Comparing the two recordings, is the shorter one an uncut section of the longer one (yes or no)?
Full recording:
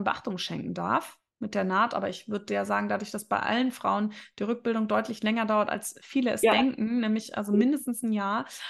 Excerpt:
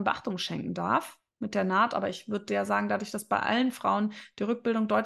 yes